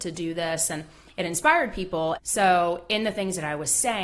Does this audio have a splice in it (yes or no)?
yes